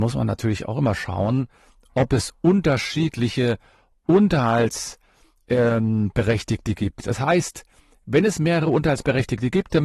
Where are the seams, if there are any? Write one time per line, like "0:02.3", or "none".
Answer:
none